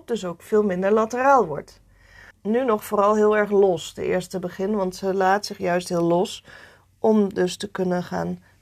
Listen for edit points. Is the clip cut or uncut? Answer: cut